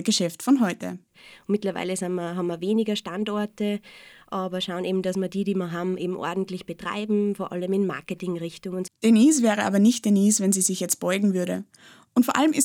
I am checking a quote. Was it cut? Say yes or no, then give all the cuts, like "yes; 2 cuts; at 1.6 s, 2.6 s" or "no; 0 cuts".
yes; 1 cut; at 8.9 s